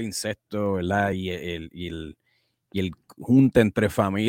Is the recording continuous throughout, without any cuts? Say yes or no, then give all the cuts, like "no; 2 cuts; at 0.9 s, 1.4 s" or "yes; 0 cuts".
yes; 0 cuts